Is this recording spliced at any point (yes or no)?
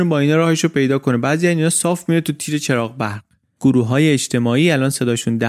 no